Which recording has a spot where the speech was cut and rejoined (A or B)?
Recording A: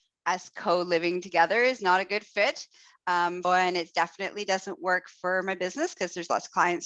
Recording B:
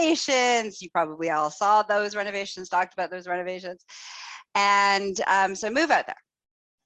A